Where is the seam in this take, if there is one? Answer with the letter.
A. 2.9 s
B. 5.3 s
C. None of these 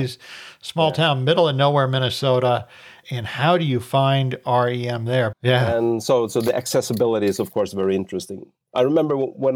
B